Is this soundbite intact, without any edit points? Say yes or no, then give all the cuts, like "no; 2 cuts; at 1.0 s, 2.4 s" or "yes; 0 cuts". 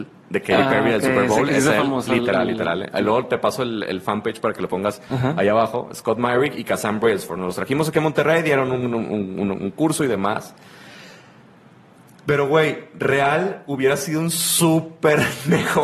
yes; 0 cuts